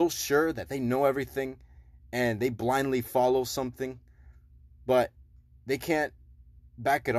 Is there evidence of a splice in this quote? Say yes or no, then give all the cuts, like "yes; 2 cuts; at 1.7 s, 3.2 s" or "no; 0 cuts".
no; 0 cuts